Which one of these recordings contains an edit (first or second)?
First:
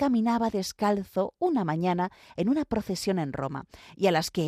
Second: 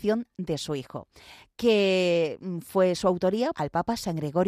second